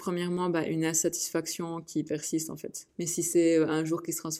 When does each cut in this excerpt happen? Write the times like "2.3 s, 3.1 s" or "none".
2.9 s